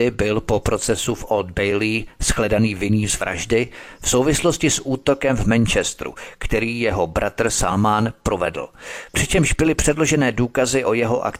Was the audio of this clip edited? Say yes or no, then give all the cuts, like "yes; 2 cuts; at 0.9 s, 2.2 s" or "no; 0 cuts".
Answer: no; 0 cuts